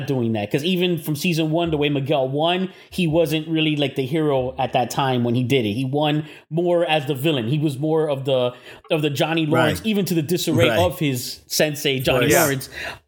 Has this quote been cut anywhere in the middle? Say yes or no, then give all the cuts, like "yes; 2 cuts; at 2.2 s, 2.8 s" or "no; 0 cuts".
no; 0 cuts